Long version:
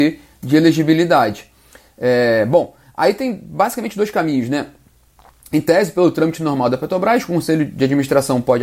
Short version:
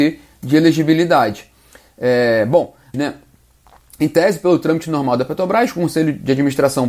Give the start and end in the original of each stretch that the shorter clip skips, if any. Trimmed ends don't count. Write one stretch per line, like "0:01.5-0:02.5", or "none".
0:02.9-0:04.5